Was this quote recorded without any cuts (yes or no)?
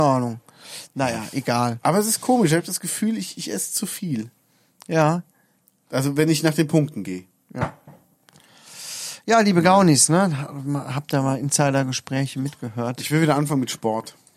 yes